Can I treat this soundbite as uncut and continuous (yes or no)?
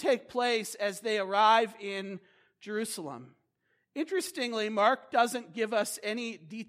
yes